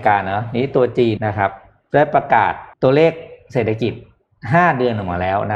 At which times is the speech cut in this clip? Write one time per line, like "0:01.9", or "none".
0:01.2
0:02.7